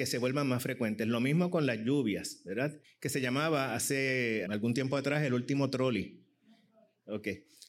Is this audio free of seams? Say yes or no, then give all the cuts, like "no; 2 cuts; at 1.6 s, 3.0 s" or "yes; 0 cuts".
no; 2 cuts; at 2.8 s, 4.5 s